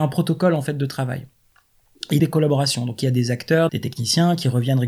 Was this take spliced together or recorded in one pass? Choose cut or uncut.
cut